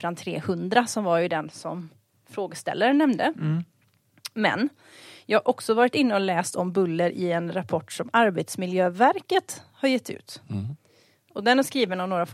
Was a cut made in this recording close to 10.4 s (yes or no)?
no